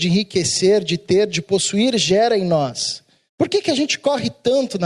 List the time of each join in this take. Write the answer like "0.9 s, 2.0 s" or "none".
3.3 s